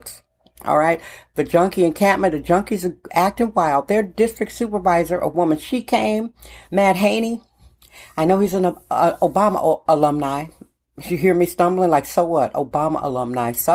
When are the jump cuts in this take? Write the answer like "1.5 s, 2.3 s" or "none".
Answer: 6.7 s